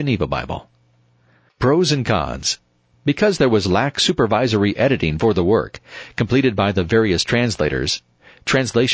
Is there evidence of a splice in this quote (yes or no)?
no